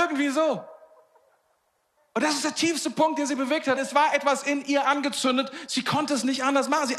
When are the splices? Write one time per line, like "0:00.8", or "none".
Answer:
0:03.8